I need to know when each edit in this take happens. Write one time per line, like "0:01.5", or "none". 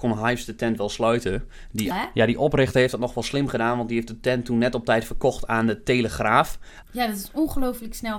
0:01.9
0:06.8